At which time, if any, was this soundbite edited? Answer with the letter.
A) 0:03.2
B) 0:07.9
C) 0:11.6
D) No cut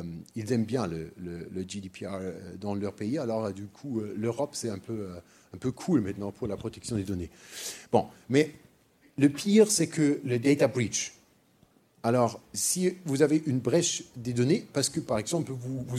D